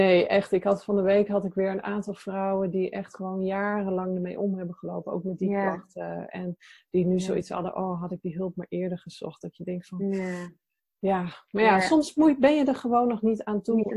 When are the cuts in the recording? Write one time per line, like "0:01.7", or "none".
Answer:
none